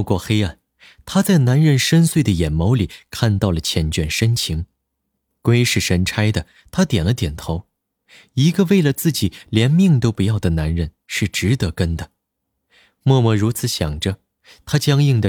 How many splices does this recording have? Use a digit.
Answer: 0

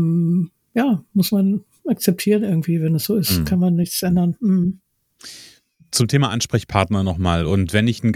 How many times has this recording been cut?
0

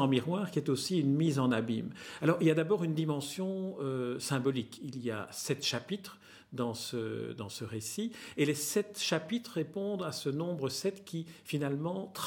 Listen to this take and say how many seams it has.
0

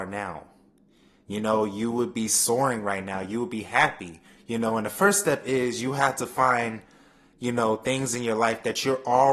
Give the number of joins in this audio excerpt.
0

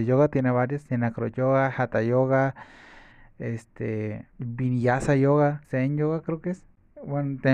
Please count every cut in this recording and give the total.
2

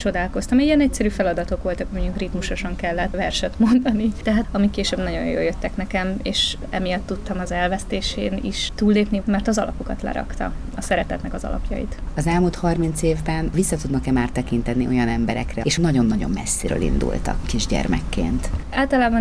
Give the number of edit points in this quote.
3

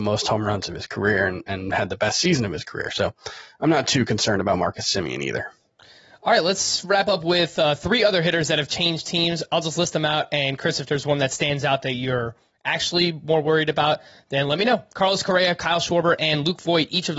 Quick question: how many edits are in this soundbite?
0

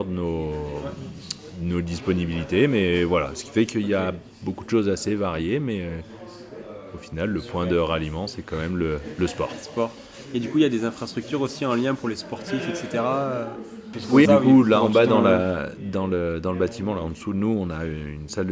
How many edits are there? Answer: 1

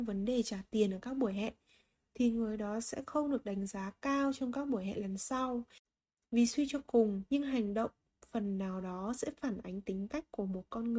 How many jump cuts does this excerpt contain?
1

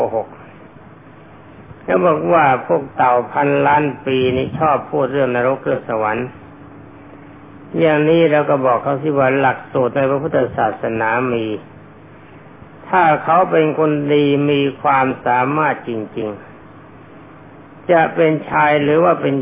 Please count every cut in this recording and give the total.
0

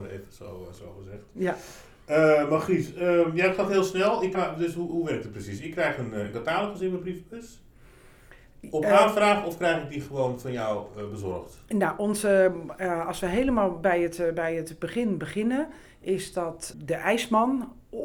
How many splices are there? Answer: 1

